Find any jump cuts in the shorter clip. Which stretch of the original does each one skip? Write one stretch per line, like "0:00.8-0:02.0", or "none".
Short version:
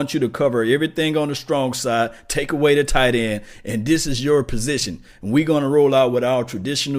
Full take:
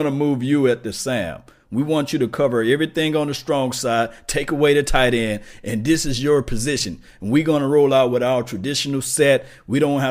none